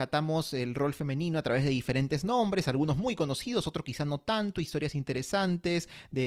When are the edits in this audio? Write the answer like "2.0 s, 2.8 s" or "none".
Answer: none